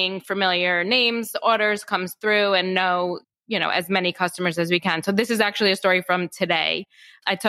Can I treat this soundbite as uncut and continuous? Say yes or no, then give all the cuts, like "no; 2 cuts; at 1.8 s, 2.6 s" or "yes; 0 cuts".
yes; 0 cuts